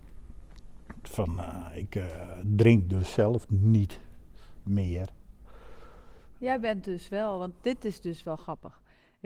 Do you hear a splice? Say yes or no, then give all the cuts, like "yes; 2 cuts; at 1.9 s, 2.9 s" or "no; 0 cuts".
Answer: no; 0 cuts